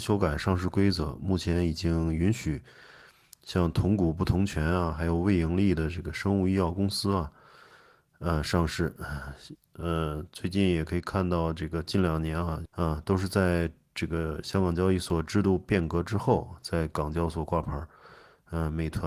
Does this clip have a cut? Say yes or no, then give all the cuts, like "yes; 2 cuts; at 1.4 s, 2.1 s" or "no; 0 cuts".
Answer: yes; 2 cuts; at 9.6 s, 12.7 s